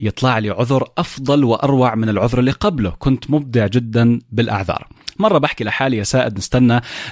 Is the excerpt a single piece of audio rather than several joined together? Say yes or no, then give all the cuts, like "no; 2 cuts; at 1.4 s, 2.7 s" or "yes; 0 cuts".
yes; 0 cuts